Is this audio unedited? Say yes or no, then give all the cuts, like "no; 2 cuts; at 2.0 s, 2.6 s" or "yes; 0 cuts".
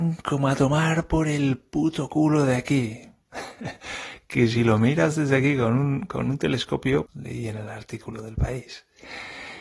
no; 2 cuts; at 3.3 s, 7.1 s